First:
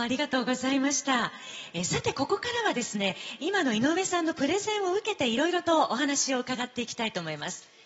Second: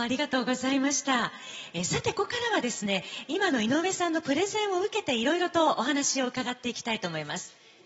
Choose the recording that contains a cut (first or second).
second